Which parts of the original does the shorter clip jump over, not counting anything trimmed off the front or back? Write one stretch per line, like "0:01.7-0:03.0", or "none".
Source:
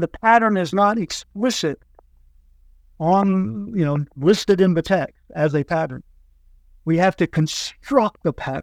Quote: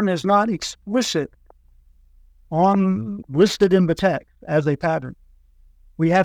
0:03.7-0:04.1